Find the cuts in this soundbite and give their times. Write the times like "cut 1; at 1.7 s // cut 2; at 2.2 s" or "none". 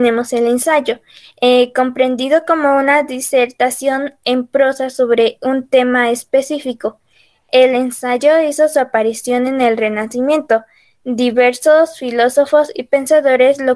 none